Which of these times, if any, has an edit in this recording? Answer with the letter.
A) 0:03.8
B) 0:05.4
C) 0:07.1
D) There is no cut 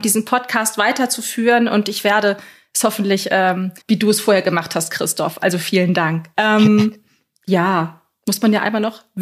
A